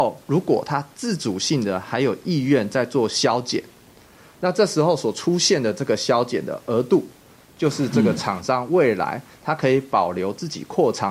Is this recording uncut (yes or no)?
yes